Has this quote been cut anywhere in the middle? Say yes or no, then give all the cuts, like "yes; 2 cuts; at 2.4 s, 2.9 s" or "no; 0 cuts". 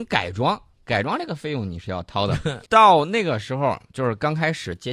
yes; 1 cut; at 2.7 s